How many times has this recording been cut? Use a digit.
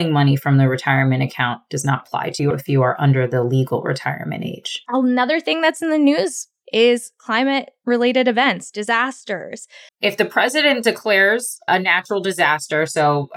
1